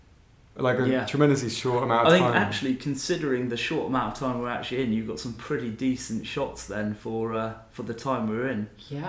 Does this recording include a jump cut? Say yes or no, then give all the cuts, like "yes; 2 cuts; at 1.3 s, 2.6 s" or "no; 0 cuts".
no; 0 cuts